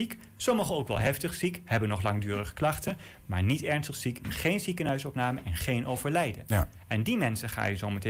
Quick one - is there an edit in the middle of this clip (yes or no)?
no